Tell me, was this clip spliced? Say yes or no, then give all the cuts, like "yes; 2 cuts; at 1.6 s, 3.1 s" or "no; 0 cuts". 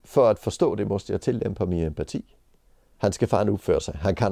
yes; 1 cut; at 2.9 s